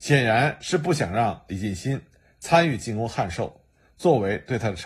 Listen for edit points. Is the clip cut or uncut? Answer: uncut